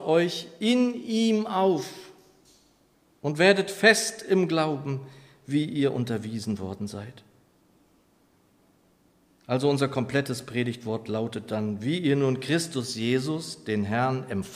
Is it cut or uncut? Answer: uncut